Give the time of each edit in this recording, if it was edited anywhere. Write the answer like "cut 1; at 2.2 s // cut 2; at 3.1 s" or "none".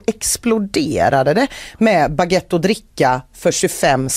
none